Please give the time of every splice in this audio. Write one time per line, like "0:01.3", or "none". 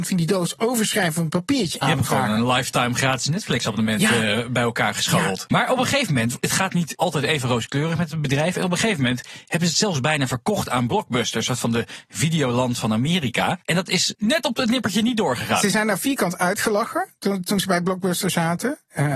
0:01.8